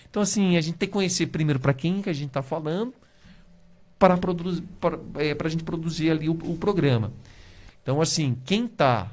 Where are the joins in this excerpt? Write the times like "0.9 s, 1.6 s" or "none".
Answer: 7.7 s